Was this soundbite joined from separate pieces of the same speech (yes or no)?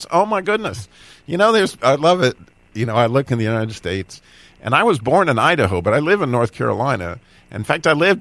no